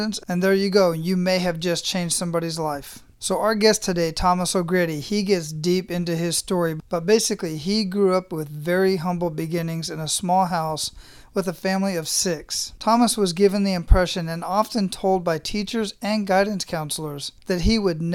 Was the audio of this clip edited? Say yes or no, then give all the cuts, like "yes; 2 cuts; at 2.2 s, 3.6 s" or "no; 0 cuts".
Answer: no; 0 cuts